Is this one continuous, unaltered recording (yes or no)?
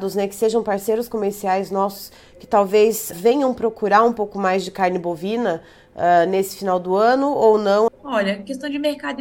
no